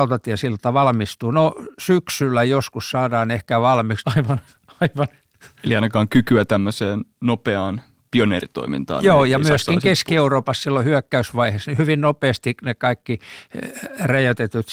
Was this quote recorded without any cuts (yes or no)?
no